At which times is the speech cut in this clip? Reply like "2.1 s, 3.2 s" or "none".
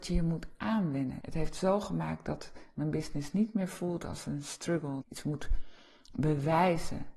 1.2 s, 5.0 s